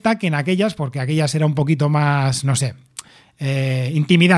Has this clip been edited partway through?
no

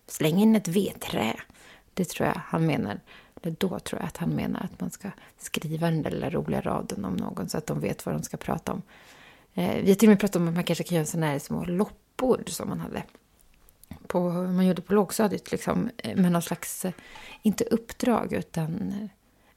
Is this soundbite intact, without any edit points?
yes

